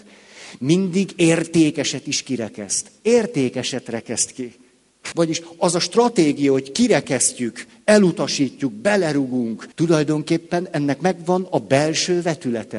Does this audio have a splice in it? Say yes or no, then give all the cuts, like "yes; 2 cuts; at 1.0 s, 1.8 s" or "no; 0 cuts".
yes; 2 cuts; at 5.1 s, 9.7 s